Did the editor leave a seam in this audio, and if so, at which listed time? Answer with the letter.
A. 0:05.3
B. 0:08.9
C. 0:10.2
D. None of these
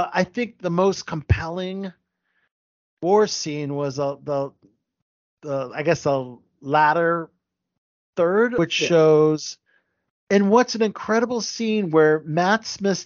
D